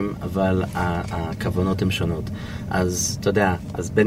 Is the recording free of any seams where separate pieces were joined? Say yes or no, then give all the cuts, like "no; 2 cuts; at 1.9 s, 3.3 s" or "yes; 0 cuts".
yes; 0 cuts